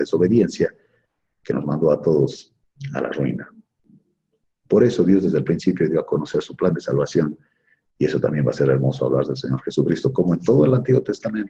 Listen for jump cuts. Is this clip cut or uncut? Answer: uncut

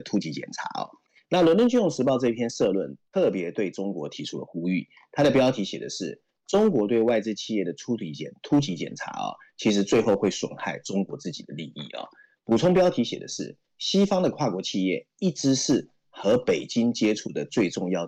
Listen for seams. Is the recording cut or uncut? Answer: uncut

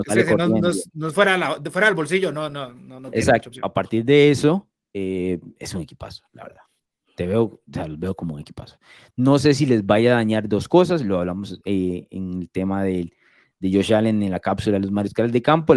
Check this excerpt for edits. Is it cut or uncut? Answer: cut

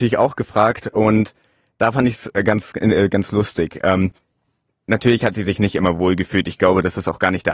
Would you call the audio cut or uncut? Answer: uncut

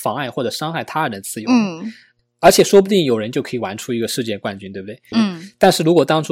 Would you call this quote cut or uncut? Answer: cut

